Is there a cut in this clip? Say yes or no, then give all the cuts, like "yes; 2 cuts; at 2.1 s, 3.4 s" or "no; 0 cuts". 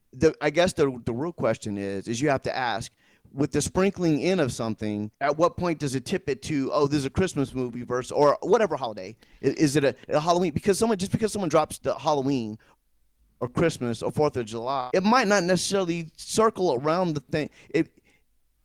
yes; 1 cut; at 5.1 s